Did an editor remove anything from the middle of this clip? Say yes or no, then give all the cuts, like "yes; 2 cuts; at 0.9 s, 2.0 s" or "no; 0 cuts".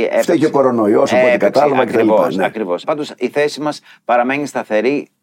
yes; 1 cut; at 2.8 s